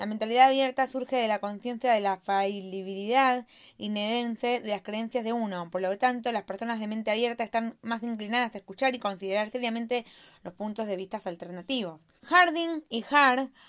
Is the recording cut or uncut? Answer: cut